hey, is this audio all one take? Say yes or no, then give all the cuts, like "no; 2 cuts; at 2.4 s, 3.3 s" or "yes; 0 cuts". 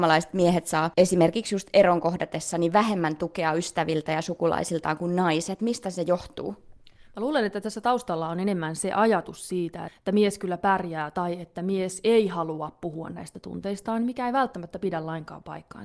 no; 1 cut; at 9.9 s